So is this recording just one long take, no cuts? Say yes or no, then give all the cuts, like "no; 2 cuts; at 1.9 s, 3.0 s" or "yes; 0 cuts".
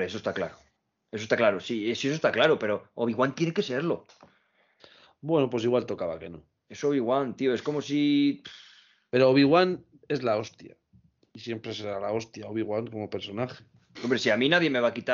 yes; 0 cuts